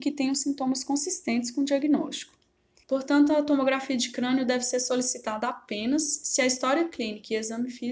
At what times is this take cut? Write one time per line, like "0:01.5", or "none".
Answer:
0:02.8